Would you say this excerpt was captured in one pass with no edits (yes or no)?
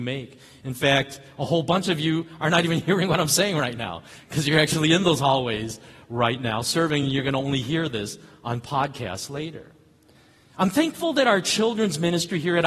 yes